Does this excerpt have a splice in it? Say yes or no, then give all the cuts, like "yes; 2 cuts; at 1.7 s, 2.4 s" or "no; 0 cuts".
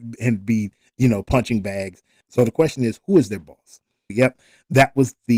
yes; 2 cuts; at 2.2 s, 4.1 s